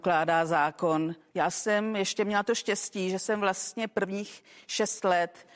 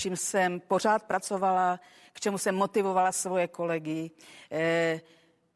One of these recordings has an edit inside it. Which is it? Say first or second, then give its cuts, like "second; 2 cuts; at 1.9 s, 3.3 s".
first; 1 cut; at 1.3 s